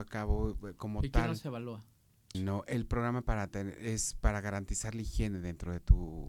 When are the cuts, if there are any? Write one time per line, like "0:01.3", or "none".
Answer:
0:02.3